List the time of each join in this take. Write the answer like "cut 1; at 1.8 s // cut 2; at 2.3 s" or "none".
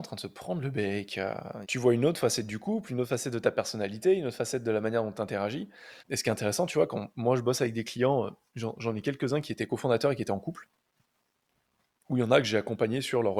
cut 1; at 1.6 s // cut 2; at 6.0 s

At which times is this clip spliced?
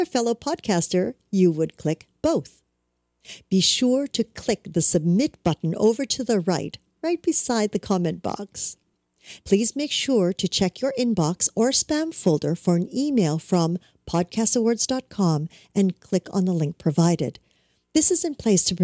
cut 1; at 9.4 s

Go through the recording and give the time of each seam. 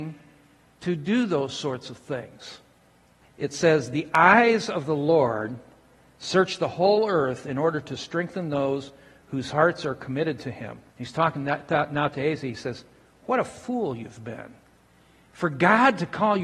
cut 1; at 3.2 s // cut 2; at 10.9 s

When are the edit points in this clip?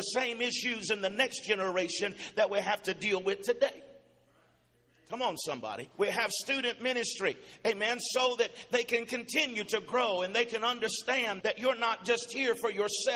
cut 1; at 5.9 s // cut 2; at 11.4 s

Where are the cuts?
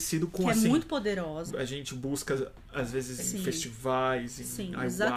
cut 1; at 1.5 s // cut 2; at 3.2 s

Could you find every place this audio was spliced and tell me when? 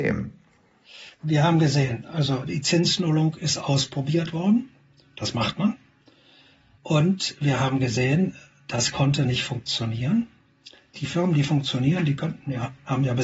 cut 1; at 1.1 s // cut 2; at 6.7 s // cut 3; at 10.9 s

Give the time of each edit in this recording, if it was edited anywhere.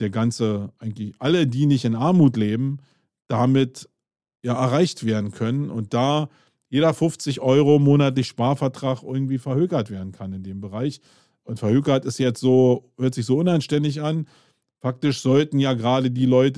none

